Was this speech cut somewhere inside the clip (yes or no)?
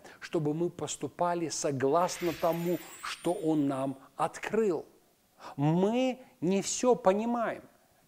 no